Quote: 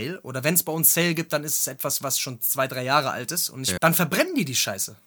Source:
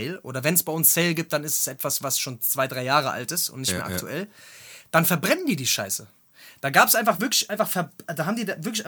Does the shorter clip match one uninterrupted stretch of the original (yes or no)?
no